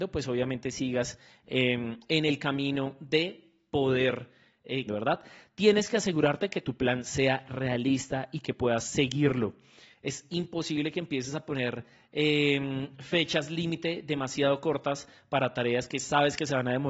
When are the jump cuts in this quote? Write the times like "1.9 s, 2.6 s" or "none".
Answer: 4.9 s